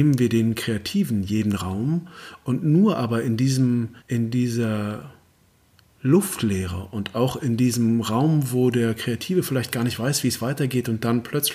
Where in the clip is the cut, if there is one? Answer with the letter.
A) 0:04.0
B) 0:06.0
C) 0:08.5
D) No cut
A